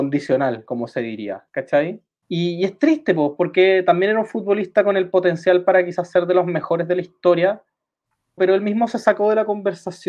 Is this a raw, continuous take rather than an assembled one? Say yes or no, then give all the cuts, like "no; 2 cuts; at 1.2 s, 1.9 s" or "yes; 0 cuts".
no; 2 cuts; at 2.2 s, 8.4 s